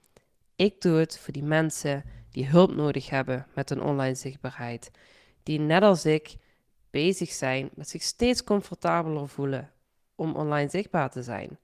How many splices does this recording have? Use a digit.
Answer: 0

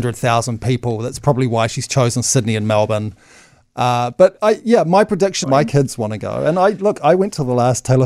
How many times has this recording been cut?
1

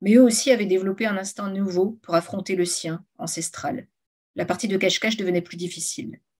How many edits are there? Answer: 0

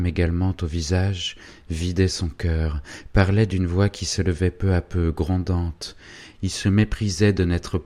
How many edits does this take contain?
1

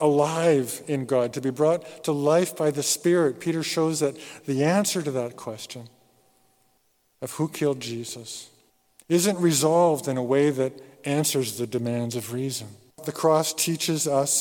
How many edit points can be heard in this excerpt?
2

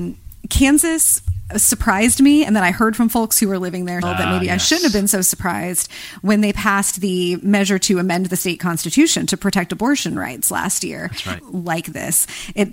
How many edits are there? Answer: 2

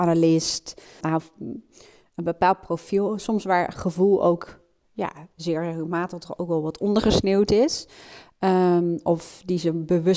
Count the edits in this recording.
1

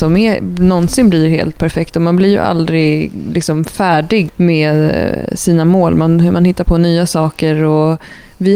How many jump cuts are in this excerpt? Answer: 1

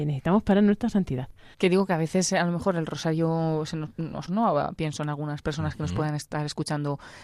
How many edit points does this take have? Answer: 2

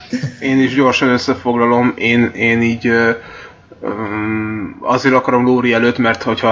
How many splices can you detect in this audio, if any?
0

